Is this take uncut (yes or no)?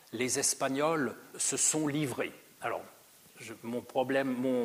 no